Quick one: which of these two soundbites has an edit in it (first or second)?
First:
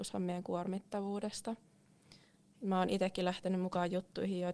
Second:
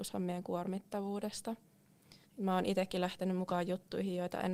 second